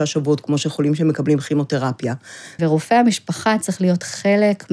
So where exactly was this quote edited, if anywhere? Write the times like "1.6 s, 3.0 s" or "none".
2.6 s